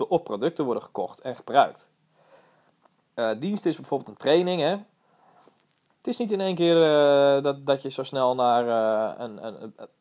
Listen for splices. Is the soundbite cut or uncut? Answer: cut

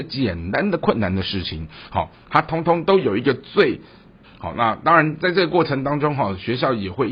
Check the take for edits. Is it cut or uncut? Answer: cut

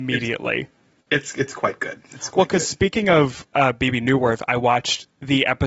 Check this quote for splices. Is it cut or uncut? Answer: uncut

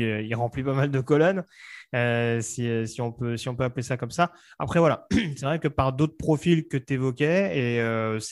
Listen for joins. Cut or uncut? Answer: uncut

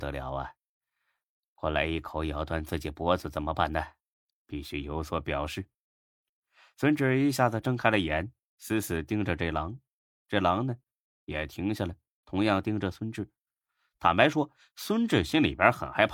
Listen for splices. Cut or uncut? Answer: uncut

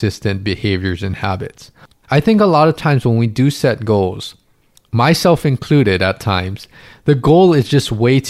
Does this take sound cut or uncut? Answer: cut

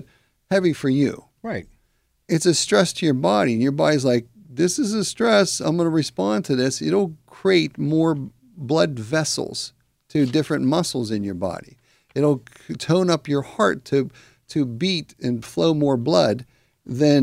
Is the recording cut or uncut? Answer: uncut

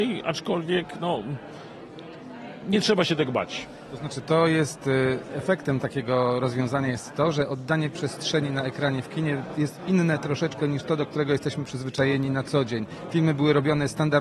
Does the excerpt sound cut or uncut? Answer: cut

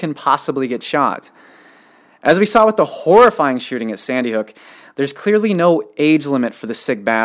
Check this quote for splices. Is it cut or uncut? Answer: uncut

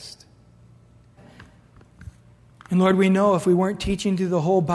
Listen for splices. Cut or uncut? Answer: cut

